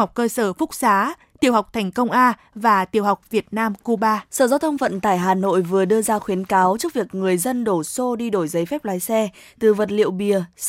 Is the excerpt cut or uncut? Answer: cut